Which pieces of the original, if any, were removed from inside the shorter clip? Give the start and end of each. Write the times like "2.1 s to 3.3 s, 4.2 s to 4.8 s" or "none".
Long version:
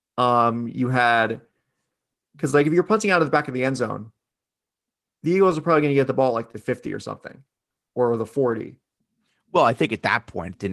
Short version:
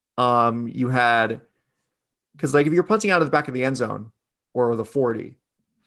4.5 s to 7.9 s